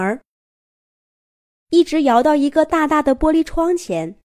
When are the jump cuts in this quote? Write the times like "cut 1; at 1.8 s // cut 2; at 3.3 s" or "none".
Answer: cut 1; at 1.5 s

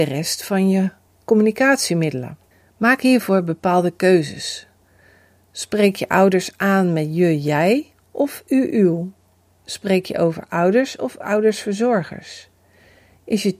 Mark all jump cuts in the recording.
none

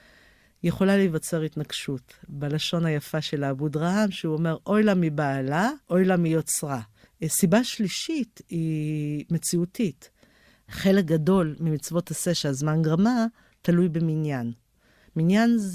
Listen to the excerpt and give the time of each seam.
cut 1; at 5.8 s // cut 2; at 7.1 s

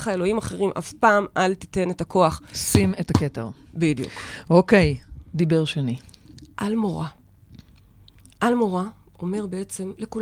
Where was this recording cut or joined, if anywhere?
none

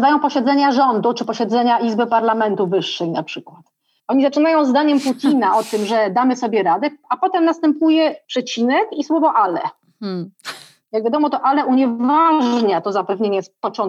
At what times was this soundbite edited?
cut 1; at 4.0 s

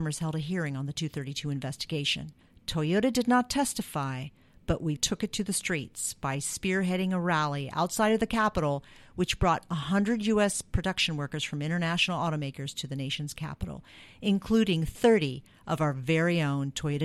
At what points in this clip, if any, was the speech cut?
cut 1; at 5.0 s

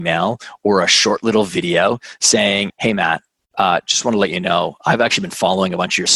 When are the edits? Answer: cut 1; at 2.7 s

